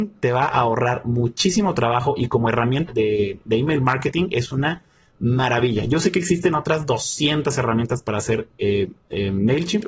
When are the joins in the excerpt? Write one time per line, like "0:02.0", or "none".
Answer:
0:02.9